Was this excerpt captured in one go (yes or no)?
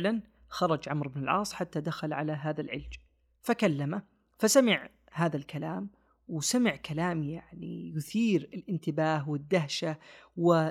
yes